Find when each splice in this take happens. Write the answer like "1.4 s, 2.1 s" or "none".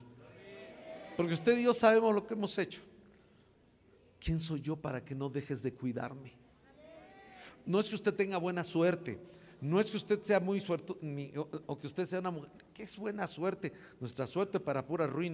none

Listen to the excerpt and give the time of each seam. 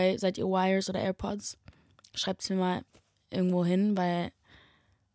none

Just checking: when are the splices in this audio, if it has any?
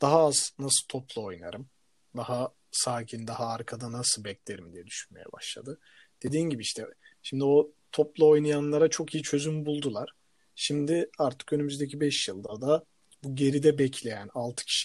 none

